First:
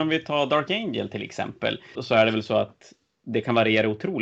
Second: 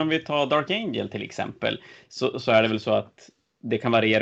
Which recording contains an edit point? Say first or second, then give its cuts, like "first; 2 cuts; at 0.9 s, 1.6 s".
first; 1 cut; at 2.0 s